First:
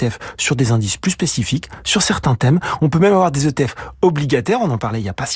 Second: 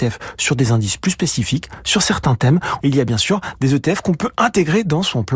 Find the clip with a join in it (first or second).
second